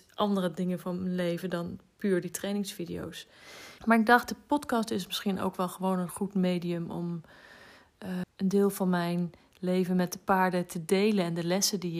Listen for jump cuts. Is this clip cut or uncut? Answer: cut